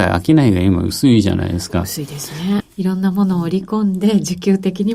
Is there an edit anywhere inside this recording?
yes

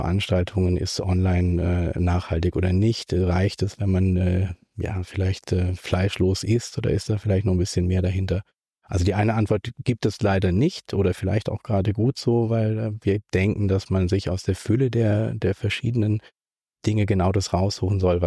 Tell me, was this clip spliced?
no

